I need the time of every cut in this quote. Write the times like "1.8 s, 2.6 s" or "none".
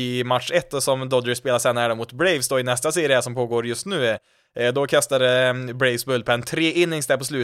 none